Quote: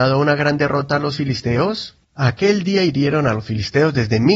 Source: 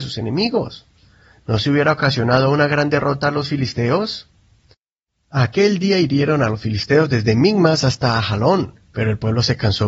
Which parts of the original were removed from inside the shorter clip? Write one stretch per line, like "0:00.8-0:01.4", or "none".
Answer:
0:04.4-0:05.2